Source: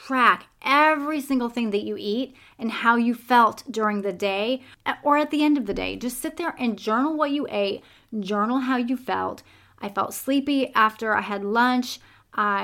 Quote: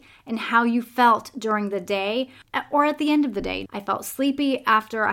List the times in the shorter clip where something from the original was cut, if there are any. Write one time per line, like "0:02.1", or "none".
0:03.7